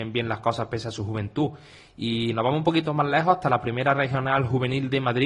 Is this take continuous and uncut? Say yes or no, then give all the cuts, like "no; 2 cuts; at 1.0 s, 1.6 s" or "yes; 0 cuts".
yes; 0 cuts